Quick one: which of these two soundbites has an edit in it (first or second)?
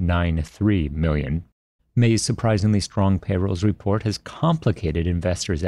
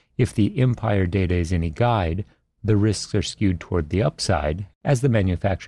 first